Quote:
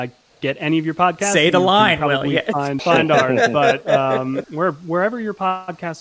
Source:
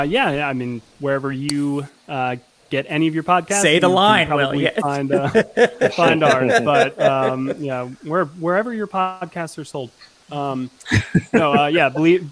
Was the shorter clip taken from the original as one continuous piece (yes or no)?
no